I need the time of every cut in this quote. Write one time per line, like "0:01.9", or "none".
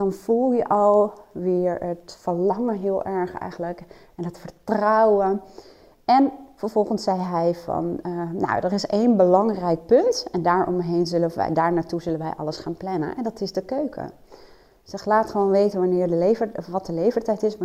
none